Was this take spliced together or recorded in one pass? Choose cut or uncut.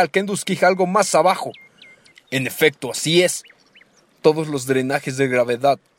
cut